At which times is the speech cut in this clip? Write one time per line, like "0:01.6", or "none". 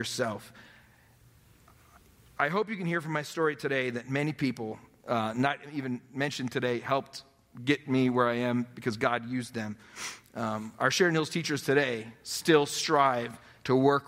none

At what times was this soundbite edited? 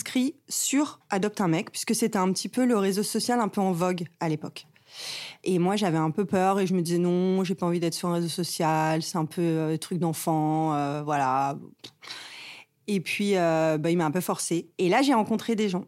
0:14.7

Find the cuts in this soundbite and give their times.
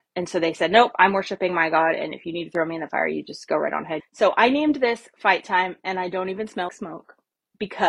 0:04.0
0:06.7

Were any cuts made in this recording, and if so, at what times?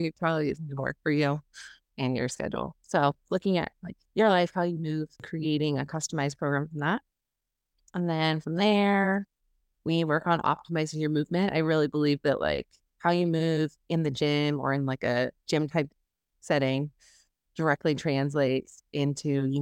0:05.2

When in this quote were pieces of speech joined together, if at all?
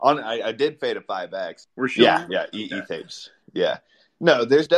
0:01.6

